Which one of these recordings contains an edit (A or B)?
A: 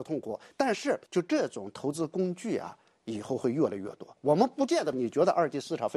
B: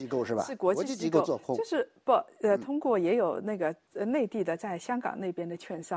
A